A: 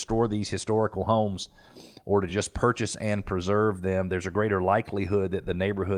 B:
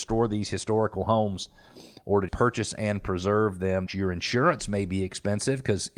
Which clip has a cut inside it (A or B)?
B